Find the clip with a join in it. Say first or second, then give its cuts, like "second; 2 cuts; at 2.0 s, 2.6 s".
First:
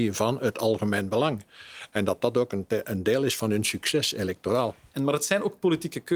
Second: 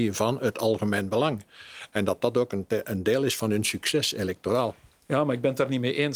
first; 1 cut; at 4.9 s